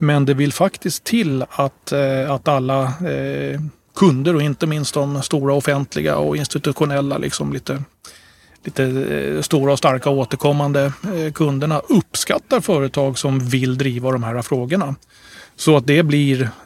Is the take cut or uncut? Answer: uncut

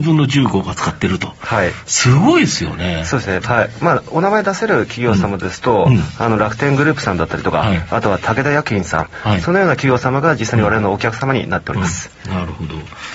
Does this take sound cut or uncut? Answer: cut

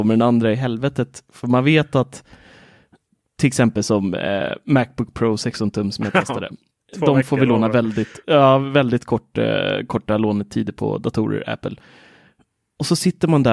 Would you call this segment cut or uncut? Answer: uncut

